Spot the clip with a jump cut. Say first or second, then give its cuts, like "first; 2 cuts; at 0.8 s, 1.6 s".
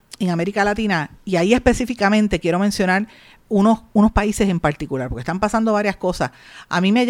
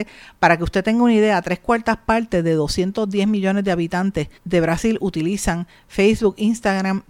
second; 1 cut; at 4.4 s